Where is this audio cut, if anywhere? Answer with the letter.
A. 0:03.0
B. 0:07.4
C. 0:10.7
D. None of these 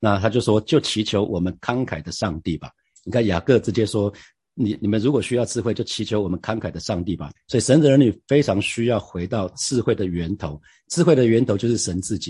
B